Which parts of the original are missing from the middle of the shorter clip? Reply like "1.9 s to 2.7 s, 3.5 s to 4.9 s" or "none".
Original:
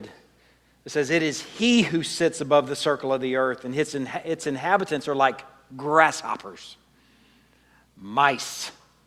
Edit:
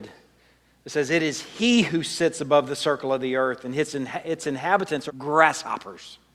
5.1 s to 5.7 s